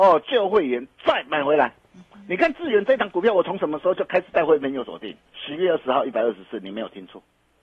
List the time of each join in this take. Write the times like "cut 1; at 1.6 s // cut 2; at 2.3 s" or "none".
cut 1; at 5.3 s